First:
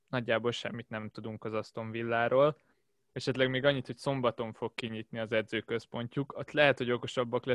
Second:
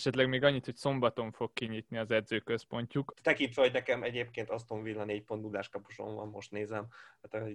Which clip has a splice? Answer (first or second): second